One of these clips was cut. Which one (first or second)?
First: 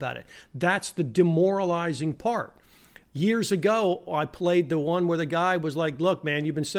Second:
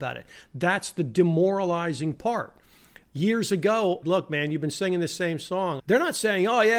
second